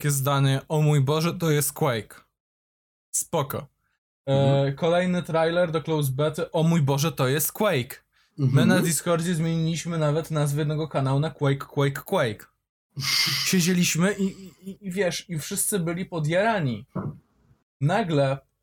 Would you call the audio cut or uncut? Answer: uncut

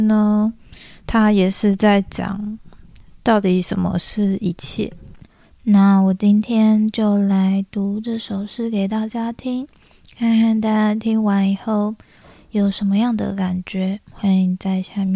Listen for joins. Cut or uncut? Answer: uncut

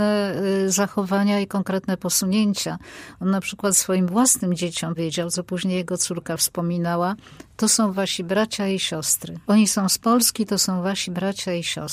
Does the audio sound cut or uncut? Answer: cut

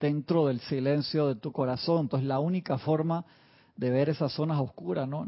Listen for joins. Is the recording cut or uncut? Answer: cut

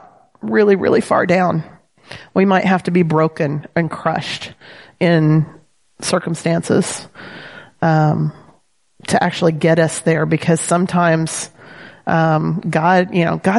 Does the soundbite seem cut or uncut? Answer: uncut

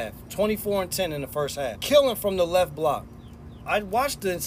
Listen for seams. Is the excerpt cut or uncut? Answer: cut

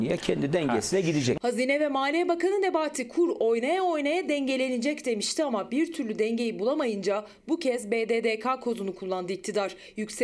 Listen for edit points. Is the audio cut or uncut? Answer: uncut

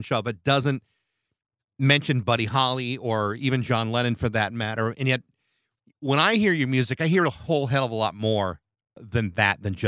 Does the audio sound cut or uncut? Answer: uncut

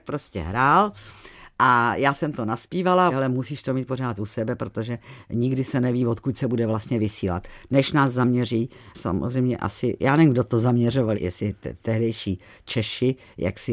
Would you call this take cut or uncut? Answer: cut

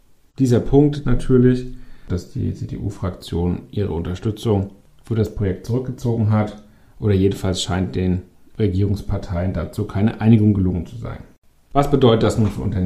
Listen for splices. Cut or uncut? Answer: cut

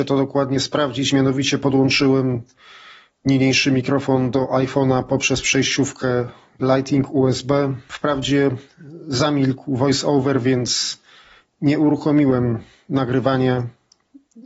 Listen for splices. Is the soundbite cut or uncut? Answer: uncut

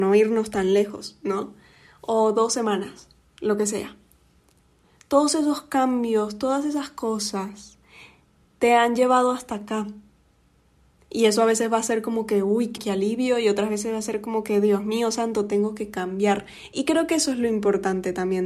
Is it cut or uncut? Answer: cut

